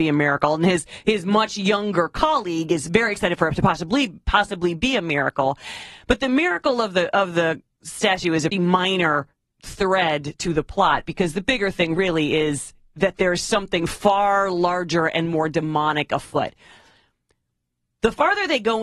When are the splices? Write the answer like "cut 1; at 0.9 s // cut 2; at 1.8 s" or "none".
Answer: cut 1; at 8.5 s